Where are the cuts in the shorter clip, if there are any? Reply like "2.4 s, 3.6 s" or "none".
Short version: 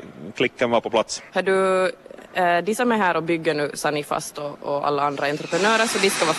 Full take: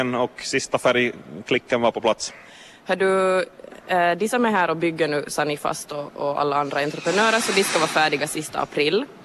1.3 s